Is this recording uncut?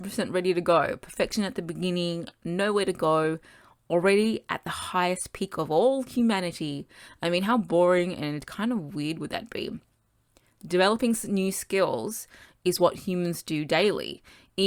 yes; 0 cuts

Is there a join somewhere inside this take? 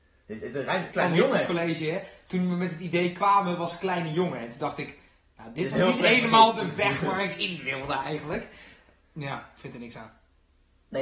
yes; 2 cuts; at 0.9 s, 9.0 s

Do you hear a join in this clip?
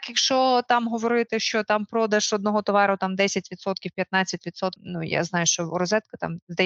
yes; 1 cut; at 4.8 s

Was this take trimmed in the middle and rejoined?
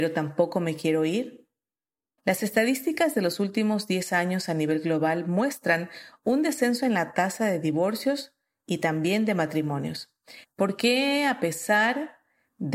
yes; 2 cuts; at 2.2 s, 10.4 s

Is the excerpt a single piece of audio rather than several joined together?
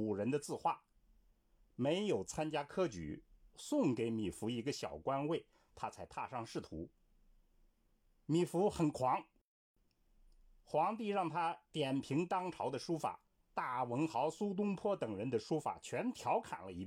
no; 2 cuts; at 3.5 s, 13.4 s

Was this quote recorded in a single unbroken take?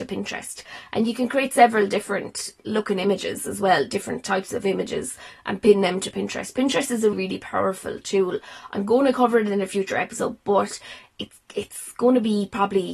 no; 1 cut; at 7.1 s

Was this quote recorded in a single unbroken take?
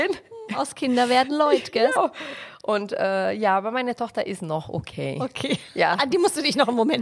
no; 1 cut; at 2.0 s

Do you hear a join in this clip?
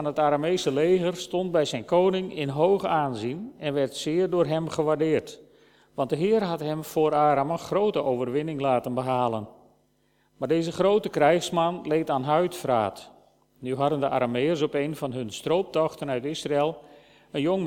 no; 0 cuts

